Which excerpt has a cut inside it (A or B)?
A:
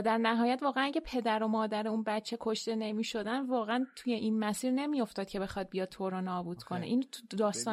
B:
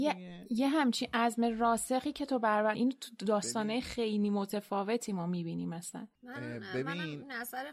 B